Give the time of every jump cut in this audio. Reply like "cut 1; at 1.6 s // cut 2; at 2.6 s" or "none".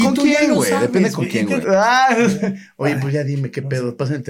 cut 1; at 1.6 s